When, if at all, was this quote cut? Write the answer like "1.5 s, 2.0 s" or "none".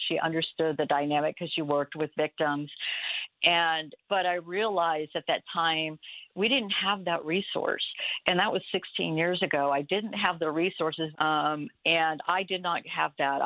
4.0 s, 11.1 s